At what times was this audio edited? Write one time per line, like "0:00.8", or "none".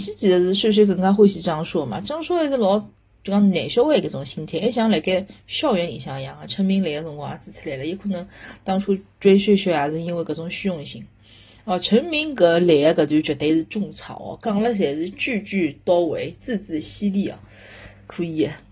none